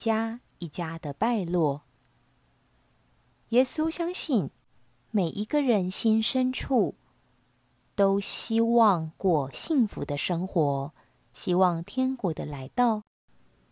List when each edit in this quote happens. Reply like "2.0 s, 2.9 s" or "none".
none